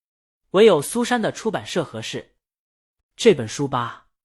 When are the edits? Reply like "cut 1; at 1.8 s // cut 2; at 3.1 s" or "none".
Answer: cut 1; at 3.0 s